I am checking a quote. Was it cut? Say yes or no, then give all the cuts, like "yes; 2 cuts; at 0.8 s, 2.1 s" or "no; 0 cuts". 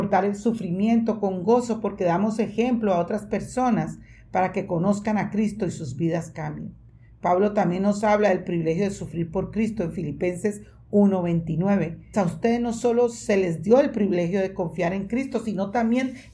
yes; 1 cut; at 12.1 s